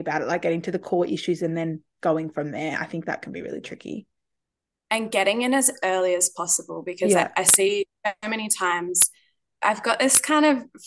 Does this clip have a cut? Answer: no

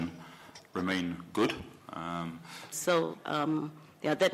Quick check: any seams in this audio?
yes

